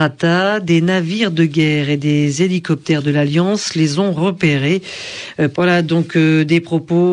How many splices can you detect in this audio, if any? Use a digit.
1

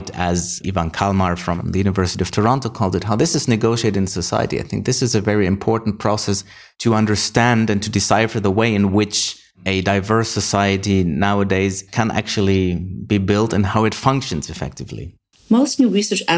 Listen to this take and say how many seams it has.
1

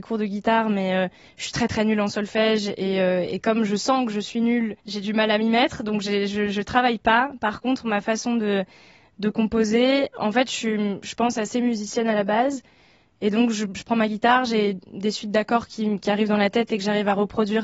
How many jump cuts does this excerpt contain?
1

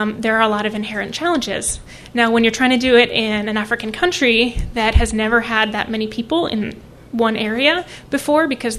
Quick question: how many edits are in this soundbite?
0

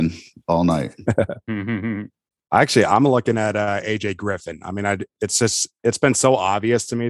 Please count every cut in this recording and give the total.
0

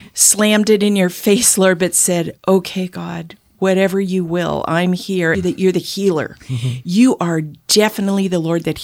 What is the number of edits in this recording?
1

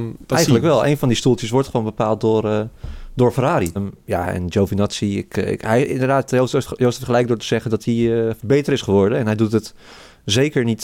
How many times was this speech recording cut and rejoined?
1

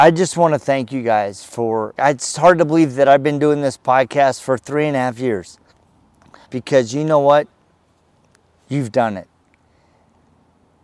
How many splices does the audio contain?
2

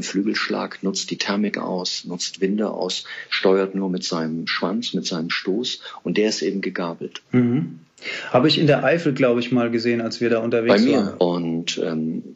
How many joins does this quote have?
1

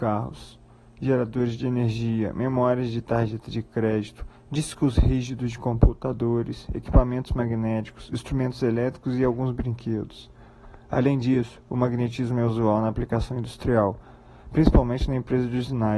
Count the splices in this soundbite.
0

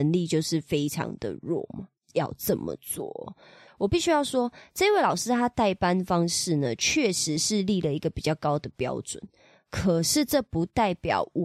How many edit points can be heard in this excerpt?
2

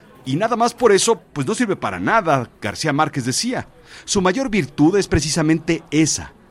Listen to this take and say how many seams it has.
1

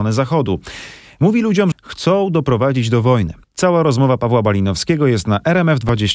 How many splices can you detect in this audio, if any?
2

